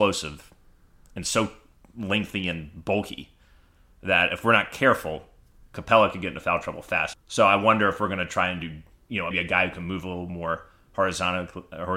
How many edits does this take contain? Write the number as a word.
two